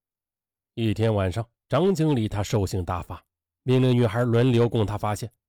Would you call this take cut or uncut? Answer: uncut